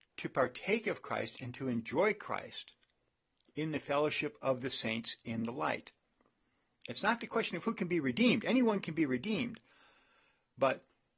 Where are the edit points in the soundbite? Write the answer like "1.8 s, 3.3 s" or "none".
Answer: none